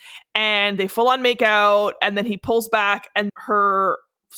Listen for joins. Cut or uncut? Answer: cut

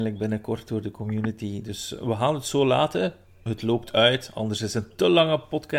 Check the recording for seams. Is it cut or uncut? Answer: uncut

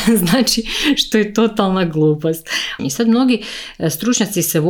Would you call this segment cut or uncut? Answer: cut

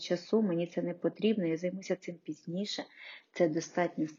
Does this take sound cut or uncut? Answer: uncut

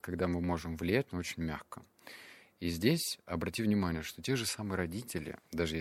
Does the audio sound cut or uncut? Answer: uncut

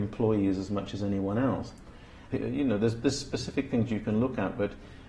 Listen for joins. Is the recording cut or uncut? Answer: cut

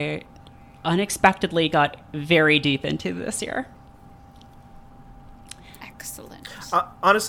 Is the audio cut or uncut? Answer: uncut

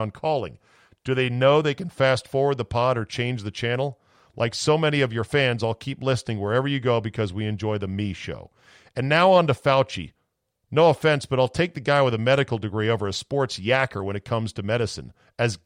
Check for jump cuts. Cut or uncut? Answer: uncut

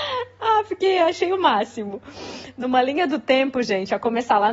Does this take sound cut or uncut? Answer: uncut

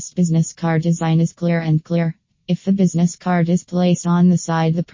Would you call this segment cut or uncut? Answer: cut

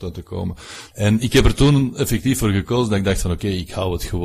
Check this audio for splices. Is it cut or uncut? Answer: cut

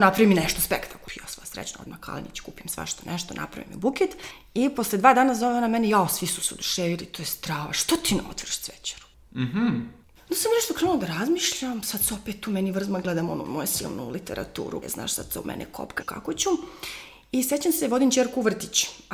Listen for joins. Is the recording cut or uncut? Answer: cut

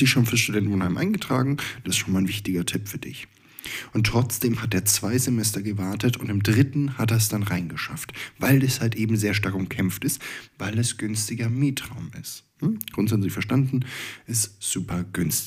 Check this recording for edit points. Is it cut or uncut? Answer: cut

